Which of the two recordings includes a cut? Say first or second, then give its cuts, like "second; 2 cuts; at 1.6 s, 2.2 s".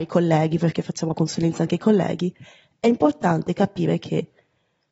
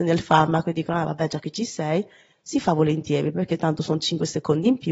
first; 1 cut; at 1.1 s